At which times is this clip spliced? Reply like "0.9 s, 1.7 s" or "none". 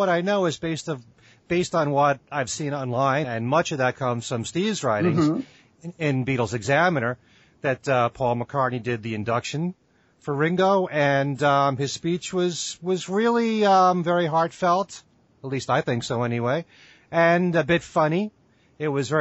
3.2 s